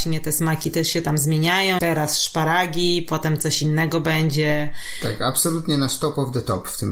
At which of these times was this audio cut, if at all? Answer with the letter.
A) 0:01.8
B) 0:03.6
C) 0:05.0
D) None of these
A